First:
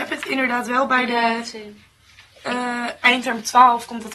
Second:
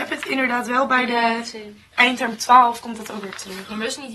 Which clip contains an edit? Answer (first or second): second